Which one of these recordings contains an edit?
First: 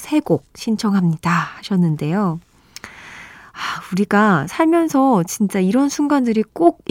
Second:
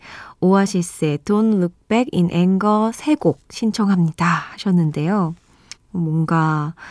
second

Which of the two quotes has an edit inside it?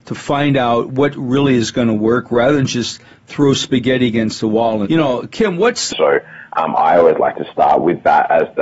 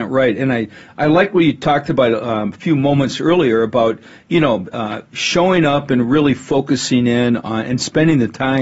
first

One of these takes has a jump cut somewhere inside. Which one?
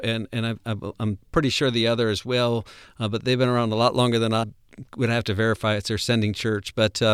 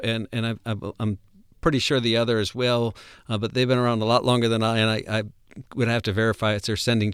first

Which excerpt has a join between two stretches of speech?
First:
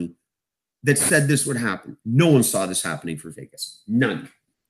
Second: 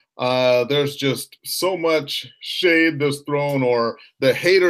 first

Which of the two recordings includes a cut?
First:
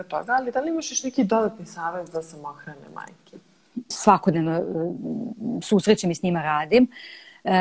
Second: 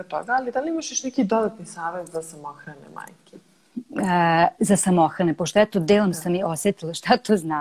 first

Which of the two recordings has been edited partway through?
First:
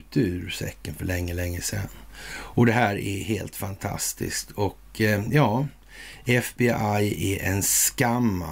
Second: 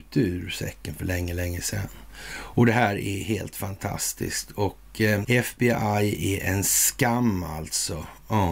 second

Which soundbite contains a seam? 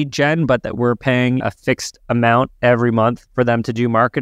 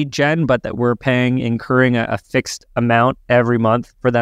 first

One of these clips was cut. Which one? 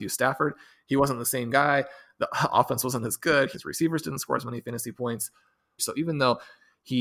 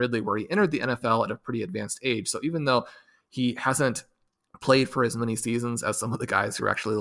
first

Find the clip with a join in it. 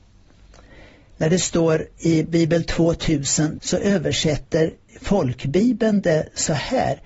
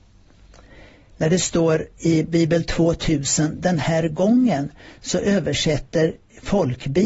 first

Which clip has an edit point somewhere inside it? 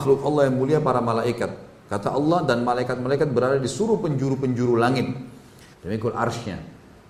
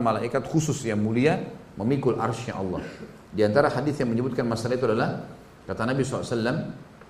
first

